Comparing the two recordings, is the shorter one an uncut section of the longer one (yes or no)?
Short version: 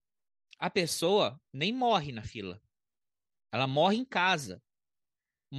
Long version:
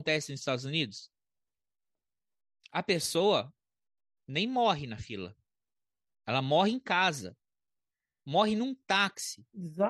no